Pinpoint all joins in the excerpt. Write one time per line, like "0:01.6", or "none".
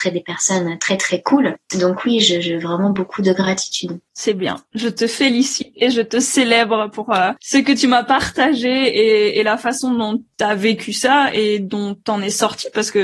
0:04.1